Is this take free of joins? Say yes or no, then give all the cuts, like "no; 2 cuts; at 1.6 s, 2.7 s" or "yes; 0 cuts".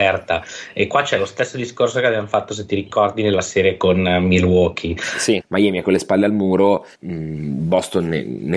no; 2 cuts; at 5.4 s, 6.9 s